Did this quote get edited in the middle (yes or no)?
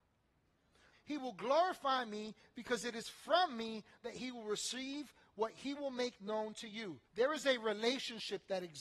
yes